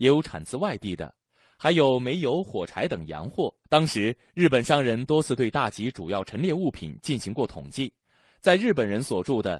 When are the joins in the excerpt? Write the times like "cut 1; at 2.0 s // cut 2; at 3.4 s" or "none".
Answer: cut 1; at 3.6 s